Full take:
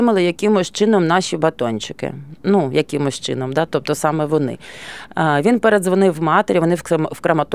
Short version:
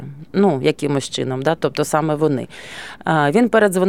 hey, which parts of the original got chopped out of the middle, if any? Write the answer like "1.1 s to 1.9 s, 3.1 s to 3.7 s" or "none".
none